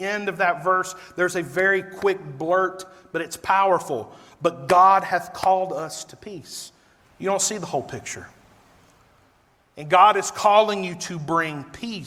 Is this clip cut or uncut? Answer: cut